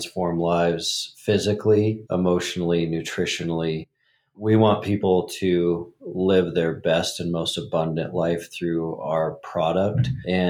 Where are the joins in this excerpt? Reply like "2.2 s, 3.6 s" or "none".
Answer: 2.1 s